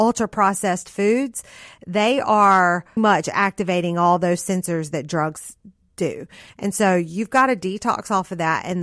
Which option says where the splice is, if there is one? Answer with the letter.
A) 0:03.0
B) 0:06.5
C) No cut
A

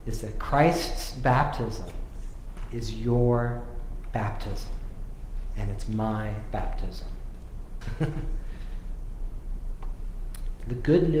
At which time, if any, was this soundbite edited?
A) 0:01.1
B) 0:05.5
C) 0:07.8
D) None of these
C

